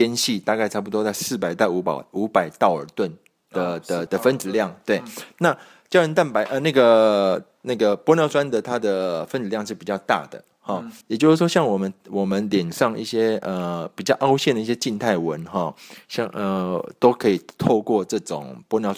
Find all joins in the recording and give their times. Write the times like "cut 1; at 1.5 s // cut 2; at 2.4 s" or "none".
cut 1; at 4.1 s // cut 2; at 11.0 s